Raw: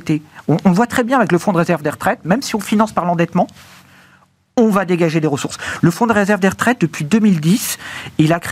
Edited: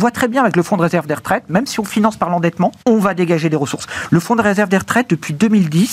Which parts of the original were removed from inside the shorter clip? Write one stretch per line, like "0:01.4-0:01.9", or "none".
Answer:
0:03.6-0:04.5